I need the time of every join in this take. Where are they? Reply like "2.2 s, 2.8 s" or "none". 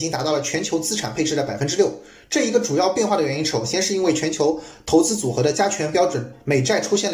none